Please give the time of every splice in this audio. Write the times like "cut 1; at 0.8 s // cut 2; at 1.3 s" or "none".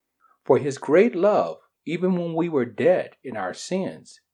cut 1; at 1.7 s